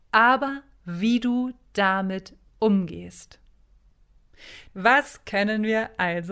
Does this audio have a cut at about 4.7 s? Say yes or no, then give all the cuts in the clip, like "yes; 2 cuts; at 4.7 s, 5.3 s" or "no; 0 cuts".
yes; 1 cut; at 4.7 s